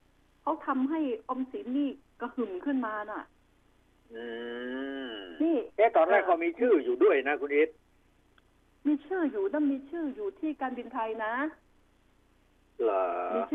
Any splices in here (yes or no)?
no